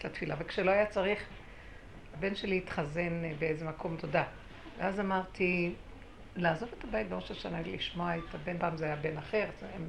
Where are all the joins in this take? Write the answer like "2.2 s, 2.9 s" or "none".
4.0 s, 8.6 s

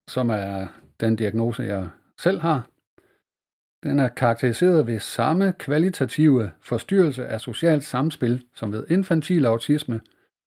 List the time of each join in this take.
none

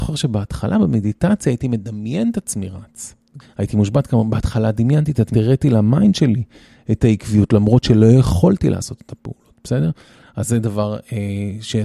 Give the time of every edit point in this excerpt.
3.4 s, 5.3 s

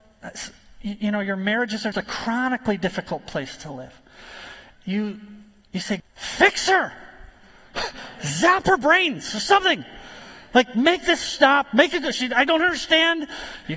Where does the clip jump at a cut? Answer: 1.9 s, 4.7 s, 6.0 s

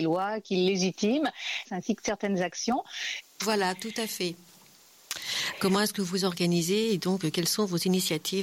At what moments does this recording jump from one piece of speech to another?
1.6 s, 3.2 s

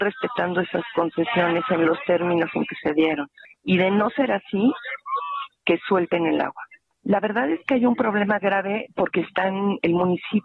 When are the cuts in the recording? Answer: none

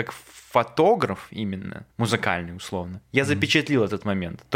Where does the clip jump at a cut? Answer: 1.9 s

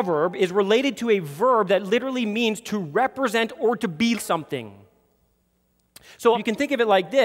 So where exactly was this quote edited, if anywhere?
4.1 s, 6.3 s

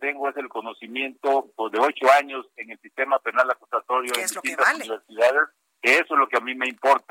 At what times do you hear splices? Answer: none

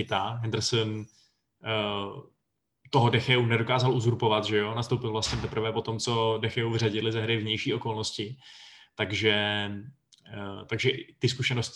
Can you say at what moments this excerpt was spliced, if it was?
none

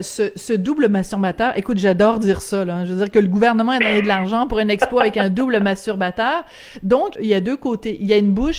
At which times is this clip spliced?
7.1 s

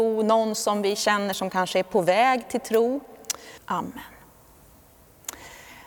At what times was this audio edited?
3.6 s

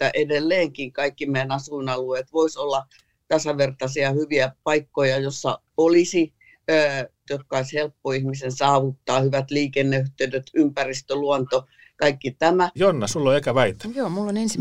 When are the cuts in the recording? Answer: 7.3 s, 12.8 s

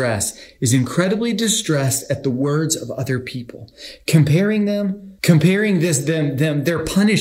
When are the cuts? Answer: 5.2 s

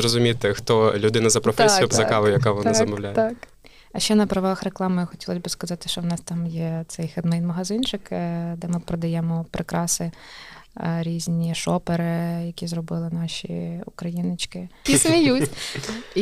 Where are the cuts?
1.9 s, 14.9 s

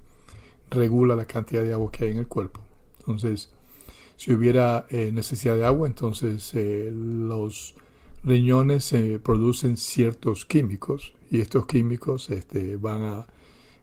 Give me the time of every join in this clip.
none

